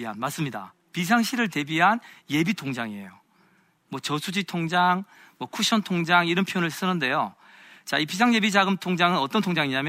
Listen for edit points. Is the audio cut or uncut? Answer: uncut